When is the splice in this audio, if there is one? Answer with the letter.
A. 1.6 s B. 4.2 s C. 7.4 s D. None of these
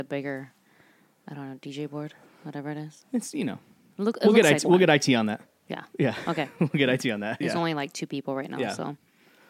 C